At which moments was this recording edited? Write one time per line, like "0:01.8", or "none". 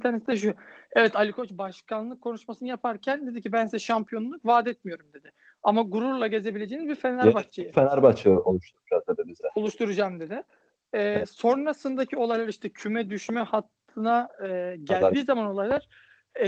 none